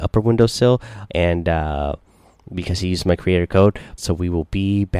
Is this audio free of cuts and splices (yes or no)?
no